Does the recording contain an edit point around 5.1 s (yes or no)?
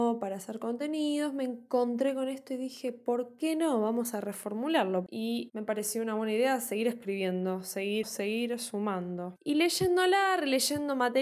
yes